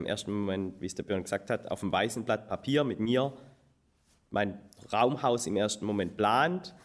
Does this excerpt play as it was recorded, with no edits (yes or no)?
yes